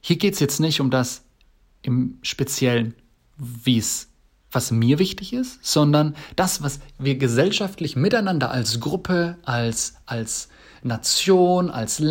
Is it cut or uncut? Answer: uncut